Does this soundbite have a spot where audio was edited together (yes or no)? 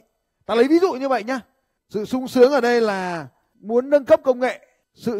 yes